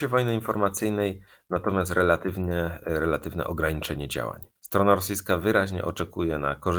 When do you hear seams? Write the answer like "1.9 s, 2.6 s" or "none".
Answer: 4.6 s